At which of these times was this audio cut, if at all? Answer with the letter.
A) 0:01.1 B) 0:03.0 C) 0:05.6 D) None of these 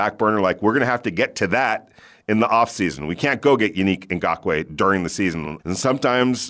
C